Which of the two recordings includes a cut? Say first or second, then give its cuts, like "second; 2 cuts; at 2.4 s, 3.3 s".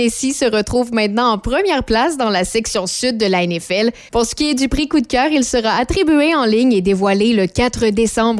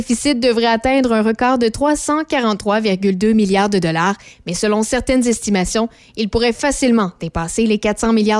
first; 1 cut; at 4.1 s